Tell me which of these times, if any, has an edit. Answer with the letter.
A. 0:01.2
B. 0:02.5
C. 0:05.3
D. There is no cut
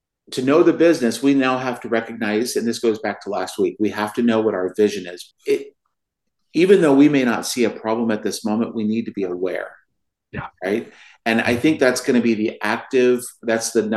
C